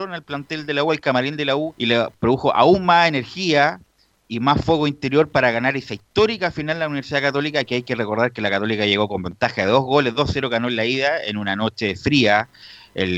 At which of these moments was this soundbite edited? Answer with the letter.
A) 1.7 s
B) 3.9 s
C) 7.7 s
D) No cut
A